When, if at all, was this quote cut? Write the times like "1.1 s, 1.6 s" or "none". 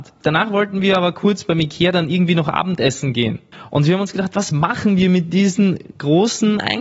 none